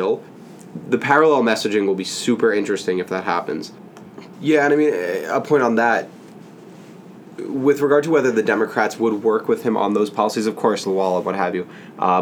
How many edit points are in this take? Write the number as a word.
two